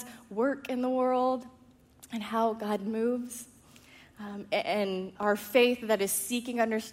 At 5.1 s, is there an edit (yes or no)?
yes